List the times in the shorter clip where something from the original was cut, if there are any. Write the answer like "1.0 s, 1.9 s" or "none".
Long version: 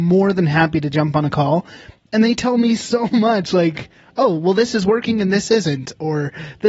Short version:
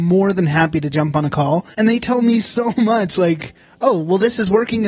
1.7 s